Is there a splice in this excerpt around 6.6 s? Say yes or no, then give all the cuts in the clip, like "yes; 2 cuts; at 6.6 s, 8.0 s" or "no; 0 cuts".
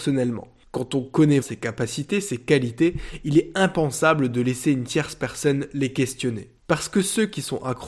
yes; 2 cuts; at 1.4 s, 6.6 s